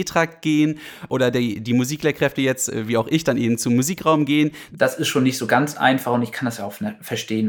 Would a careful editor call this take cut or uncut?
cut